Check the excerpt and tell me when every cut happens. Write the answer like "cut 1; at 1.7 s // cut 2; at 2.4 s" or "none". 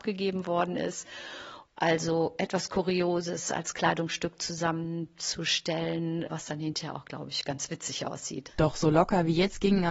none